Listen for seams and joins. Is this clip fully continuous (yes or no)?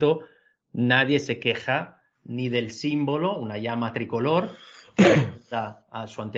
yes